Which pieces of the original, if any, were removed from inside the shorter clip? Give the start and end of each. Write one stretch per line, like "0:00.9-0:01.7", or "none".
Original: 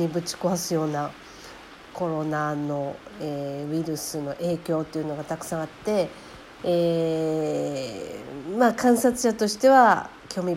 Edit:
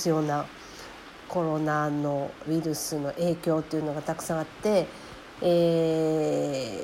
0:03.1-0:03.7